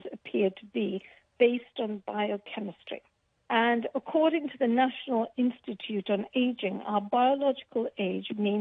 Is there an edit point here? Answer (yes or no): yes